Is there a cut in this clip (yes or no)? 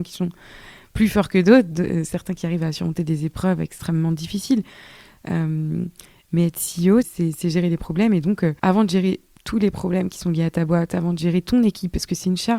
yes